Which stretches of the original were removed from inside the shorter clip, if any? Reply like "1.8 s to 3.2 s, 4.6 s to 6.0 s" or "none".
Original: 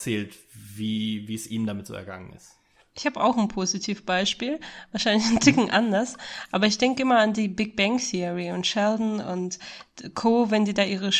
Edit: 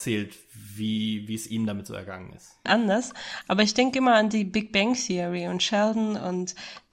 2.7 s to 5.7 s